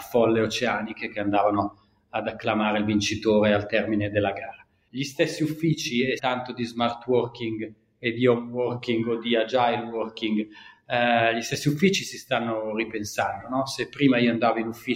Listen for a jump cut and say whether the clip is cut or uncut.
cut